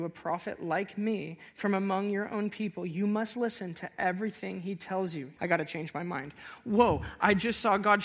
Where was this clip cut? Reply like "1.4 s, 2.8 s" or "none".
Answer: 5.4 s